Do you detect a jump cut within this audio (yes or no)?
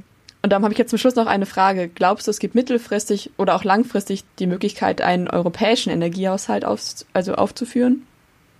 no